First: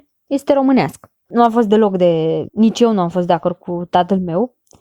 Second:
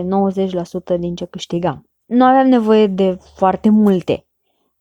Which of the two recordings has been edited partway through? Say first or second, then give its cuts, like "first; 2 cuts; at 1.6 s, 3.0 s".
first; 2 cuts; at 1.3 s, 2.5 s